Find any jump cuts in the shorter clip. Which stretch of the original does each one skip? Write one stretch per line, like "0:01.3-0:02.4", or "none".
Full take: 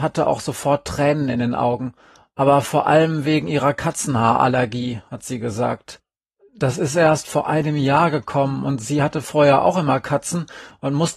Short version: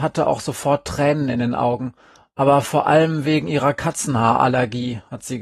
none